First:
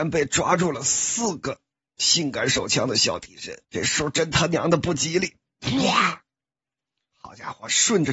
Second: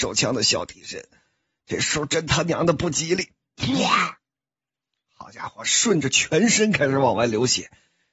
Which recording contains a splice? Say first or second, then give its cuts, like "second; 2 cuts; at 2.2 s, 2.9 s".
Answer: first; 1 cut; at 3.6 s